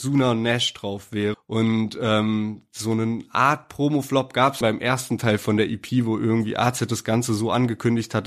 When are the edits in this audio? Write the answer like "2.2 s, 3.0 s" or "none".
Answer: 1.3 s, 4.6 s